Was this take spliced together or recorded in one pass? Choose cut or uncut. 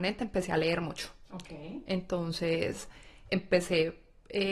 uncut